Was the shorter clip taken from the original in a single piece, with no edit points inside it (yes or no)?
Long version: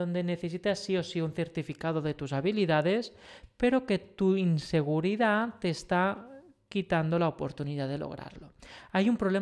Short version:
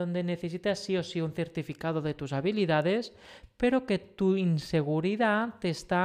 yes